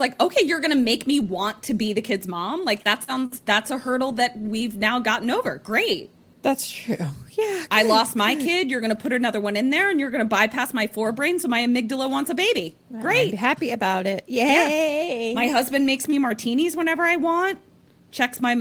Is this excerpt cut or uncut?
cut